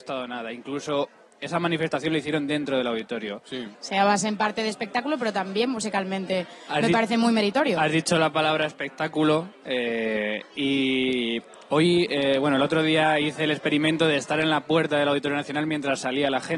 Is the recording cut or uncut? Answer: cut